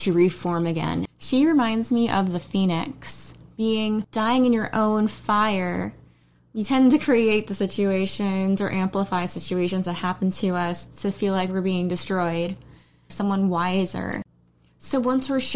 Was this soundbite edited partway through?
yes; 2 cuts; at 1.1 s, 13.1 s

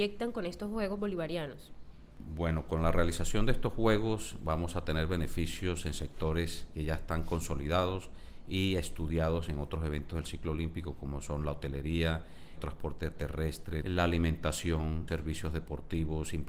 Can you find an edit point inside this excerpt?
yes; 3 cuts; at 12.6 s, 13.8 s, 15.1 s

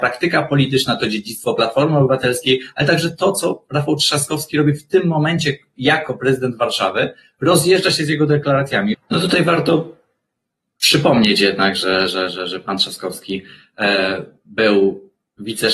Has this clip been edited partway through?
yes; 1 cut; at 8.9 s

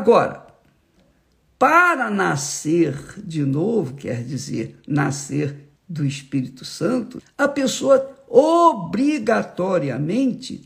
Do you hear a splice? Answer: yes; 2 cuts; at 5.8 s, 7.2 s

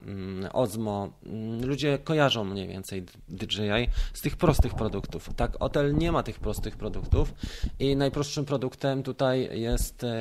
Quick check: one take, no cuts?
yes; 0 cuts

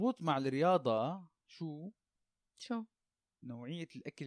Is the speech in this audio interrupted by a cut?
no; 0 cuts

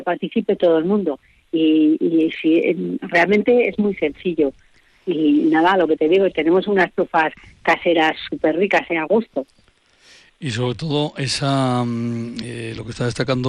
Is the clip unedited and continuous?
yes; 0 cuts

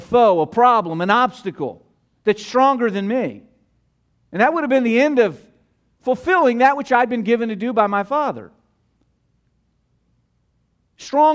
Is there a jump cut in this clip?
no; 0 cuts

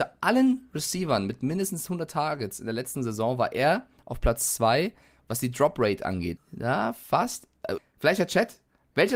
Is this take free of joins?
no; 2 cuts; at 6.4 s, 7.8 s

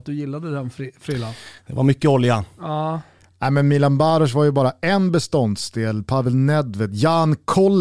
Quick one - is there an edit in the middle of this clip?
no; 0 cuts

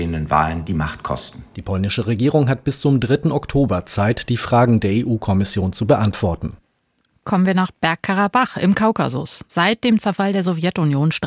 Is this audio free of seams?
yes; 0 cuts

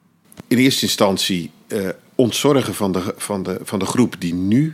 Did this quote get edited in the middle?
no; 0 cuts

